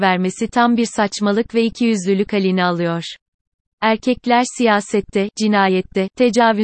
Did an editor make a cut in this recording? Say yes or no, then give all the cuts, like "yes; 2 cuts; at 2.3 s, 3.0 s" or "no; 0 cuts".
no; 0 cuts